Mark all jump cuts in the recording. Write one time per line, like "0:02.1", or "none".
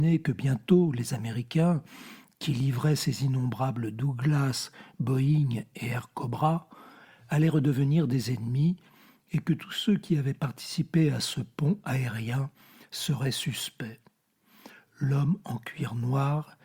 none